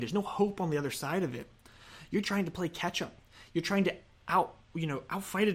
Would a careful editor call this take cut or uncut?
cut